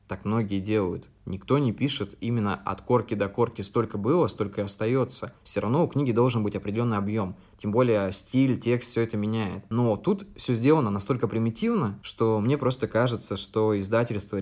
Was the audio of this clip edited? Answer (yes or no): no